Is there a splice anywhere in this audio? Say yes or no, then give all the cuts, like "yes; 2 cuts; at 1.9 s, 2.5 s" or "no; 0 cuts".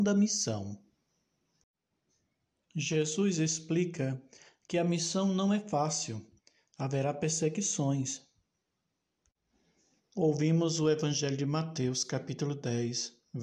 yes; 1 cut; at 10.0 s